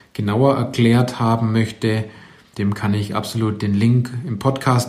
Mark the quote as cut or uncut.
cut